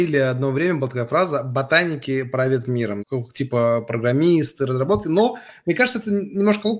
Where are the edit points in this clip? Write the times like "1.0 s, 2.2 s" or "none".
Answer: 3.0 s